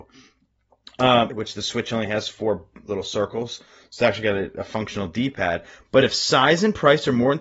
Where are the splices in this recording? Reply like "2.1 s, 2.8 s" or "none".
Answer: 1.3 s, 5.8 s